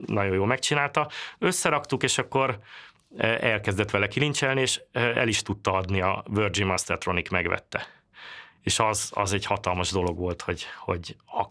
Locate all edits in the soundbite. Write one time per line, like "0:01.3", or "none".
none